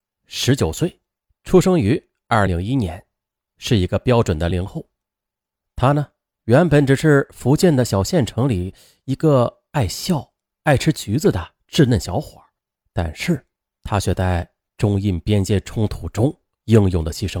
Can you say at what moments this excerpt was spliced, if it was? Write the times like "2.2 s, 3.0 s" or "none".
2.5 s, 4.5 s

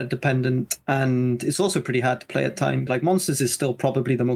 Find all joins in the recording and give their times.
2.9 s

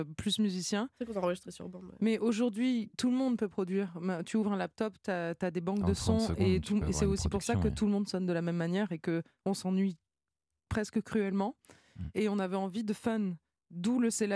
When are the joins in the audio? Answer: none

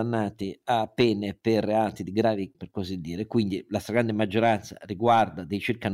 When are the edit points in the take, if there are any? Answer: 2.5 s

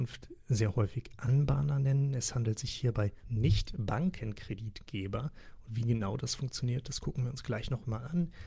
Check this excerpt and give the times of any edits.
3.2 s

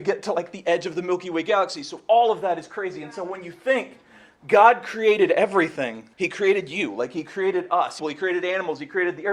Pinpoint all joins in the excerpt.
6.1 s, 8.0 s

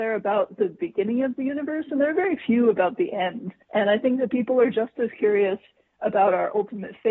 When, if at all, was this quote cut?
3.6 s

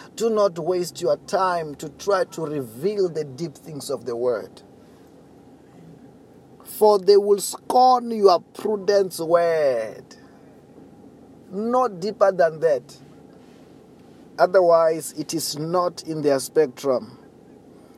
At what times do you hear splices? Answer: 11.4 s

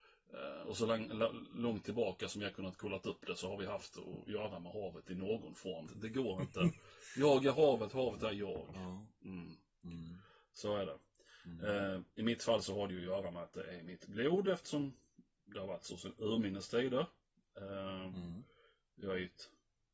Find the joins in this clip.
5.9 s

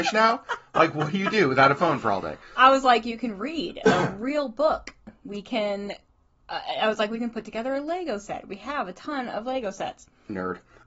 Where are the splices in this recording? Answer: none

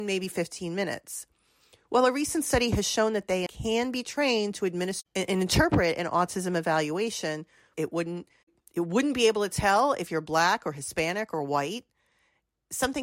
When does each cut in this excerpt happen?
3.5 s, 7.7 s

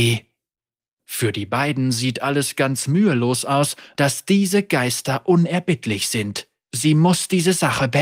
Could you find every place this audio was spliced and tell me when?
3.9 s

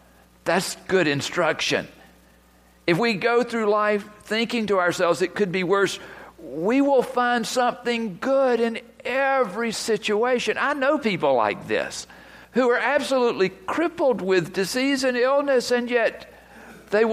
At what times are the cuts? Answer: 12.4 s

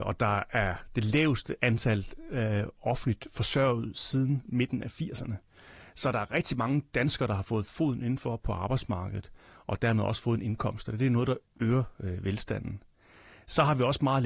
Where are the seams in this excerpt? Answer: none

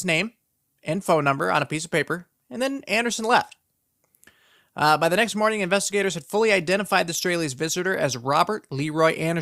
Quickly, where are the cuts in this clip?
none

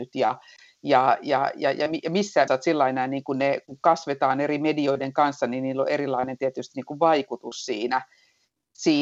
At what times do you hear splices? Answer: 2.5 s

